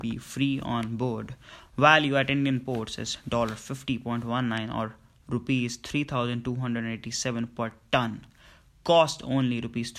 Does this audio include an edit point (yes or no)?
no